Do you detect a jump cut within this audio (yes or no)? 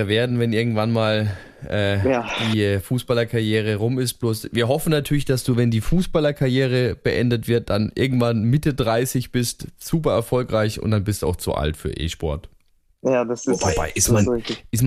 no